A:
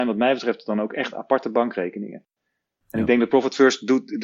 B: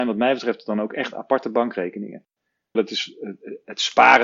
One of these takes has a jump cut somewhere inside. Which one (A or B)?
B